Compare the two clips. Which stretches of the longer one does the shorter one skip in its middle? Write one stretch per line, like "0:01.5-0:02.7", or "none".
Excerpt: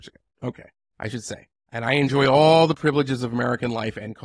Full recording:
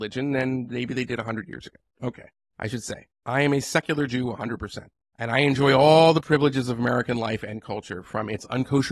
0:03.2-0:05.0